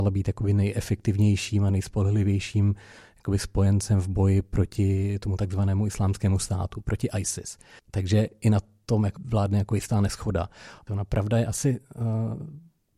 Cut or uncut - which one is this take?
cut